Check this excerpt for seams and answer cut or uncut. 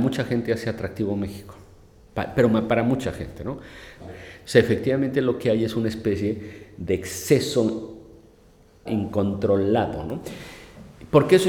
cut